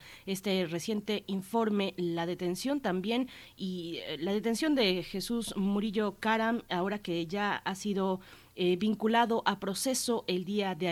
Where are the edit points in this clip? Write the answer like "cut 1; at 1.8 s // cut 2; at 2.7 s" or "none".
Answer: none